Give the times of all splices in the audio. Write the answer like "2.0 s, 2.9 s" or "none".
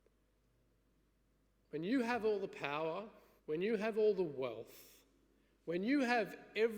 3.4 s